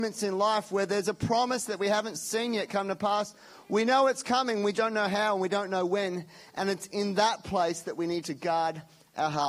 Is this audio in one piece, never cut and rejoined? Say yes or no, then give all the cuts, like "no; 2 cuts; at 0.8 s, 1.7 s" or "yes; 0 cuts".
no; 1 cut; at 4.7 s